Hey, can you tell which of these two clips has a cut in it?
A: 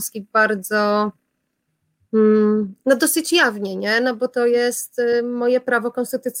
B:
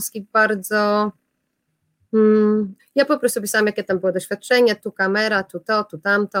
B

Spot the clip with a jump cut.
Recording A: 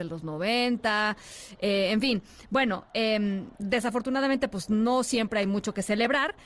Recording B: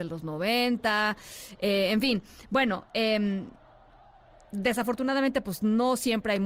A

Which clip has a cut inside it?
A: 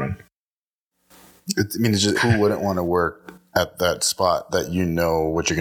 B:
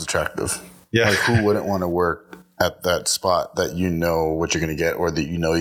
A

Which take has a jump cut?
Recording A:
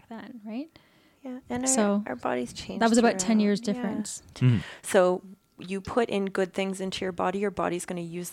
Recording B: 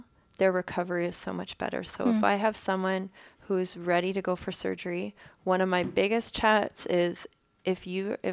A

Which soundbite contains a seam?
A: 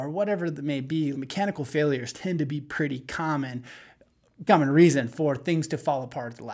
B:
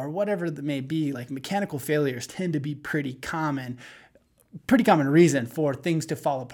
A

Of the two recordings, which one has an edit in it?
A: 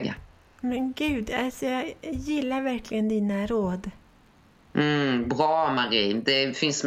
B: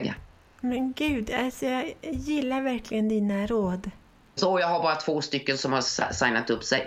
B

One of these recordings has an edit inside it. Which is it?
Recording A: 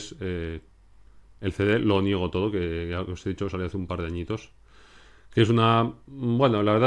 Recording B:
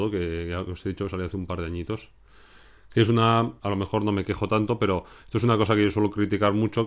B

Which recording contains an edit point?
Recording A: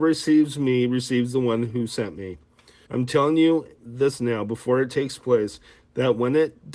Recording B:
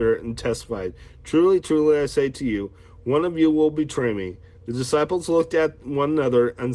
A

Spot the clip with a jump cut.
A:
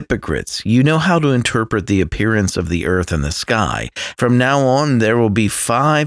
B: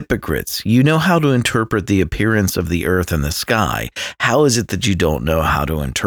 A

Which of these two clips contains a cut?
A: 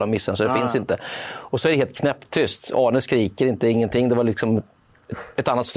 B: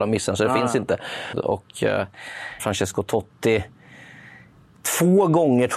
B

